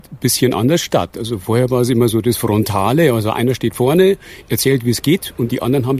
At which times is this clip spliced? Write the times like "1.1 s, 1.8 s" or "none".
none